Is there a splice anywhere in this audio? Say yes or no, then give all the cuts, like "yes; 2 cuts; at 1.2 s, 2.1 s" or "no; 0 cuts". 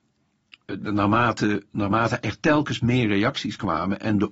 no; 0 cuts